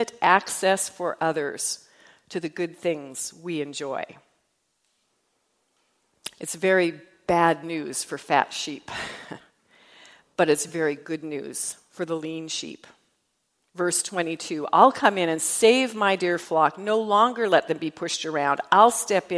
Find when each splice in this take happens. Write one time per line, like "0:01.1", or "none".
none